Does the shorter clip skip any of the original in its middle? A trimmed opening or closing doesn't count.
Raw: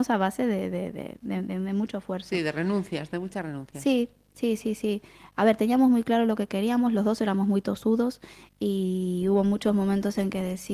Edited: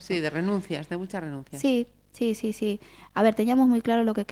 no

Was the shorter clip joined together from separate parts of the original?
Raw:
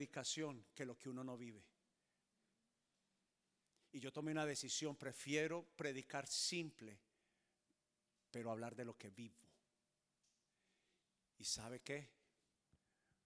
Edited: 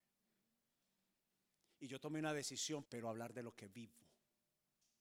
yes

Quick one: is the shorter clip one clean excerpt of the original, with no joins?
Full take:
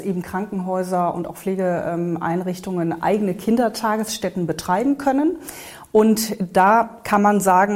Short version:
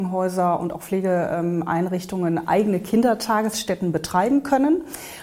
yes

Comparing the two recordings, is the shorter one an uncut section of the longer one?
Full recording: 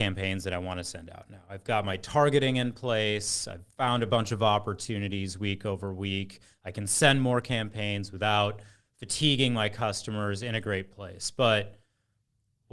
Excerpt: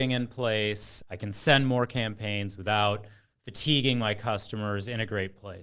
no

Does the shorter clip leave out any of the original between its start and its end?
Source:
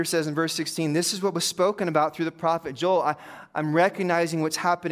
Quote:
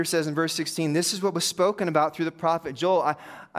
no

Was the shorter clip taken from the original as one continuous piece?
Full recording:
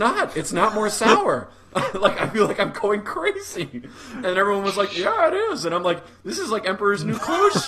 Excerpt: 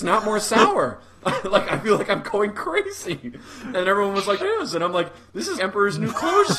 no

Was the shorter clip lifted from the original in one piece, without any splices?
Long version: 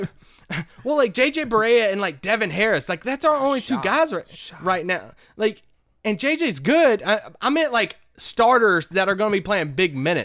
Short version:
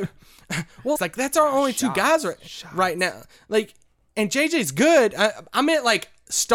no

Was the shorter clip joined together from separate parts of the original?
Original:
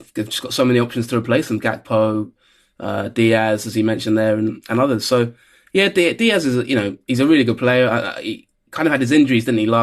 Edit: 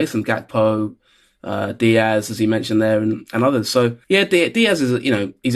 yes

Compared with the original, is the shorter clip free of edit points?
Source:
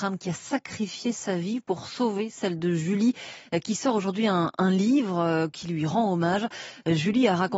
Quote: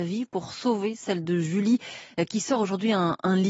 yes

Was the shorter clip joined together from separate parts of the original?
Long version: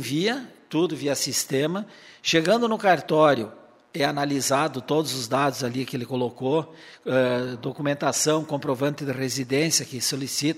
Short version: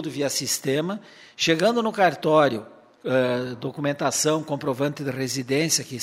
yes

